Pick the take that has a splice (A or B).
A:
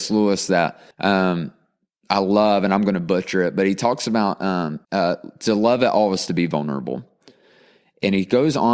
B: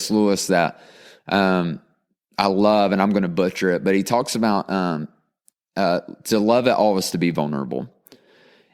A